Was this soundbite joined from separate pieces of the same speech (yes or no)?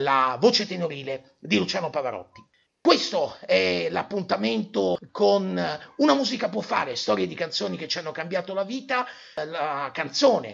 no